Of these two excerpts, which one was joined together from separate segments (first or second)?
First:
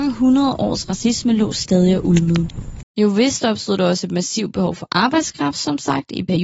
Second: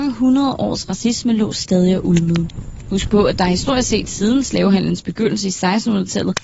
first